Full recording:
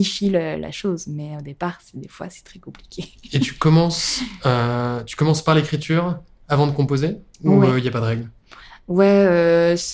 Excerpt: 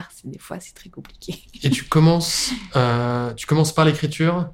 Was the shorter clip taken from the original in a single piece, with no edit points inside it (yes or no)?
yes